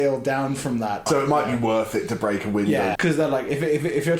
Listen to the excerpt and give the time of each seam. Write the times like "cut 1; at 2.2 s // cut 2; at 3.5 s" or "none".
cut 1; at 1.1 s // cut 2; at 3.0 s

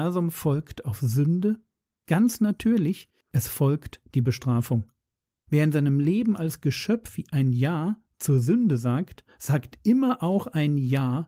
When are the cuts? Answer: cut 1; at 3.2 s

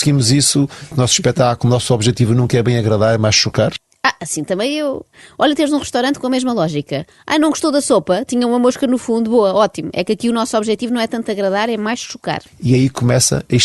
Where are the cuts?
cut 1; at 0.9 s

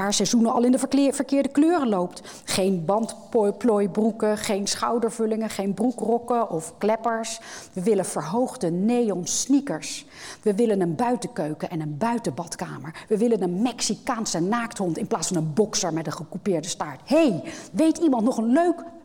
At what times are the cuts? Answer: none

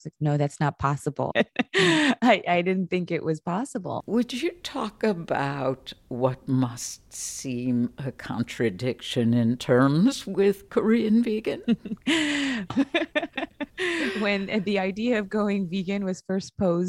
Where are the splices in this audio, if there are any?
cut 1; at 1.3 s // cut 2; at 4.0 s // cut 3; at 12.7 s

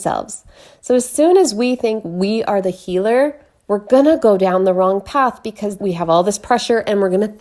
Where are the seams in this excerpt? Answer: cut 1; at 5.8 s

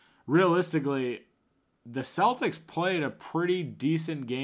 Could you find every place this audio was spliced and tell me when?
cut 1; at 1.7 s

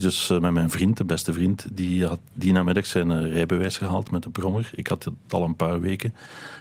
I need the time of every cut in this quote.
none

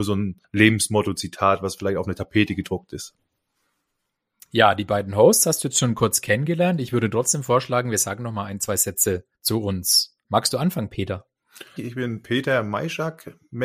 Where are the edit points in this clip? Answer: cut 1; at 9.3 s // cut 2; at 11.8 s

